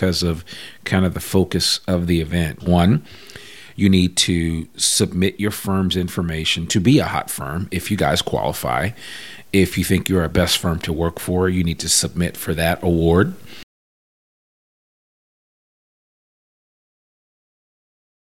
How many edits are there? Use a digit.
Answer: 1